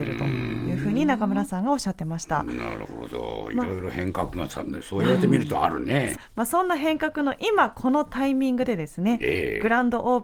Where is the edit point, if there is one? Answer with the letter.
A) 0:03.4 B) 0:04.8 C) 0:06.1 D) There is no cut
C